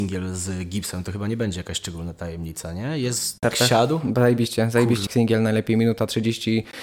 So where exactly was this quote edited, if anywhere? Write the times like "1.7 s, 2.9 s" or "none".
3.4 s, 5.1 s